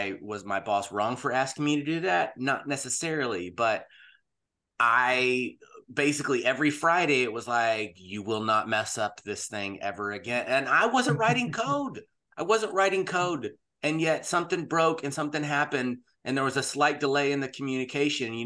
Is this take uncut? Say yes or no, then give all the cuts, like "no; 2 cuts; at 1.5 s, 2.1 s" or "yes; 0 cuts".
yes; 0 cuts